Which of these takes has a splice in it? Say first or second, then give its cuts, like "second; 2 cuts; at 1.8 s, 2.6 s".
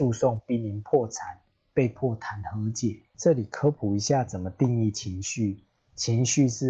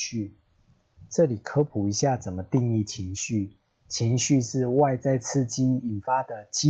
first; 1 cut; at 3.1 s